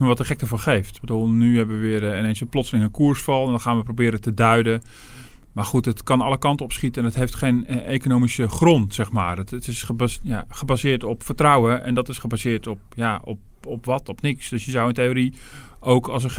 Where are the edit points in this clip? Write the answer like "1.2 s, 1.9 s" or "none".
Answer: none